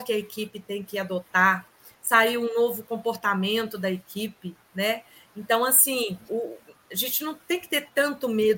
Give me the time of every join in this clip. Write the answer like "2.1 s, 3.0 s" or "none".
6.3 s